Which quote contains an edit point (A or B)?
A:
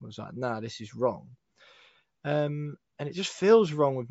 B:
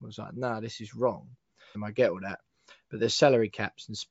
B